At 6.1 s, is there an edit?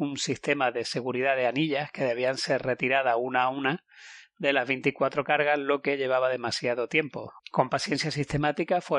no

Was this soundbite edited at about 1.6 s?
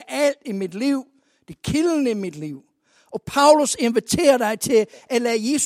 no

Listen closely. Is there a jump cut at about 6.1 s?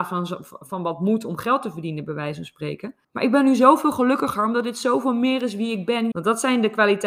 yes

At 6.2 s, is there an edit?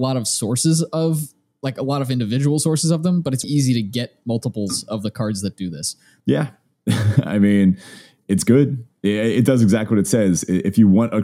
yes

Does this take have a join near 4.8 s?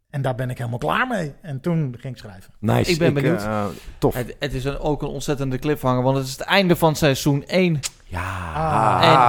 no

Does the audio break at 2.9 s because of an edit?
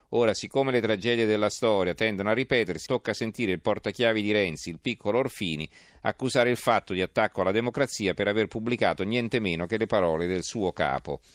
yes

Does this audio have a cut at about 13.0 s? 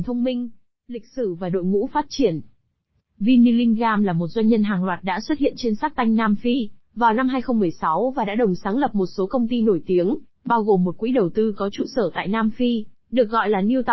no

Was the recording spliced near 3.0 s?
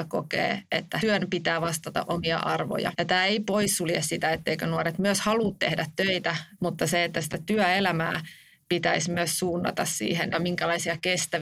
no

